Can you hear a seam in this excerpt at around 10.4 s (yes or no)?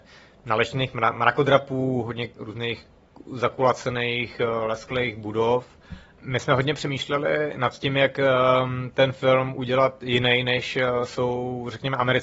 no